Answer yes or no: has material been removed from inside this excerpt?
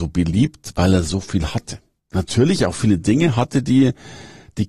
no